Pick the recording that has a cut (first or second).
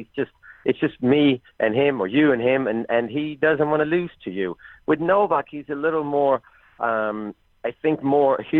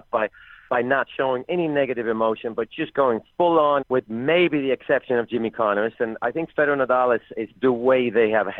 second